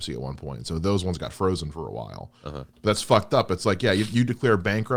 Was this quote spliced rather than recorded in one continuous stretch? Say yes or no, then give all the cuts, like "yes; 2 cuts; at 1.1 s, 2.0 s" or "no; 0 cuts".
yes; 1 cut; at 2.7 s